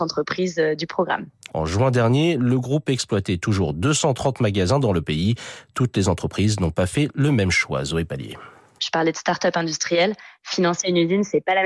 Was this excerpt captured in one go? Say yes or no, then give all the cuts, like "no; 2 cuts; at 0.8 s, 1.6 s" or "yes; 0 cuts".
no; 2 cuts; at 1.5 s, 8.8 s